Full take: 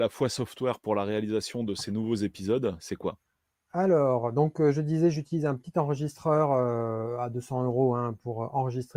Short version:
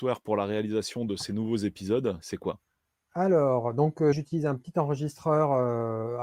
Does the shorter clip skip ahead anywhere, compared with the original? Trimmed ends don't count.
yes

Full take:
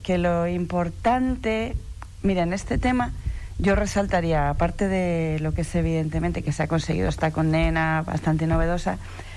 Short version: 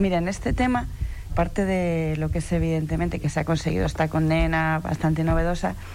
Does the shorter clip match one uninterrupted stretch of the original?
no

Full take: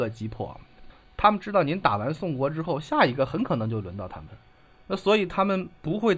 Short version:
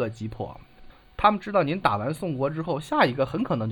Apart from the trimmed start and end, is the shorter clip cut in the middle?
no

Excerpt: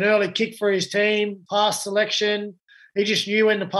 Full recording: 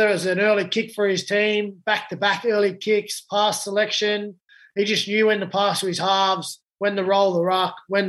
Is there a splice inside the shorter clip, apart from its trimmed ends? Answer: yes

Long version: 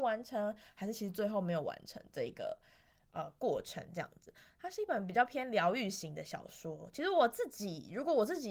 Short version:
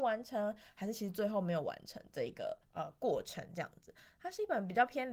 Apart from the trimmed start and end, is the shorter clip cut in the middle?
yes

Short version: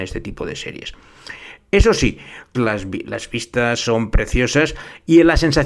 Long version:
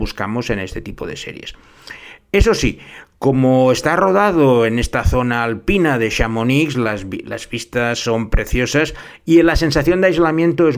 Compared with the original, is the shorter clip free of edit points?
no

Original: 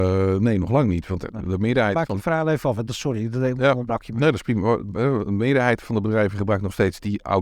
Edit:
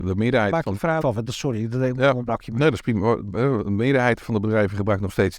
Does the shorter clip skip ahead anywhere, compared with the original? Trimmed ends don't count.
yes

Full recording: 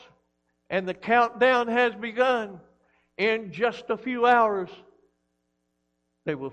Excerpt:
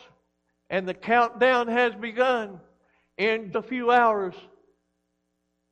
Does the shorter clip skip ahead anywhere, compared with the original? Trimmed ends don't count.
yes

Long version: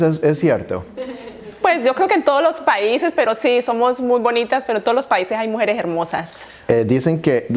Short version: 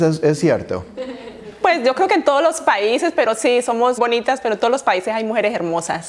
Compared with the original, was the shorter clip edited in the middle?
yes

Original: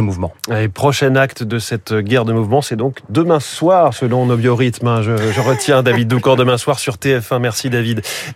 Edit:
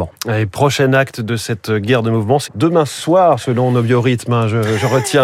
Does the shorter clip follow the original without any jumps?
no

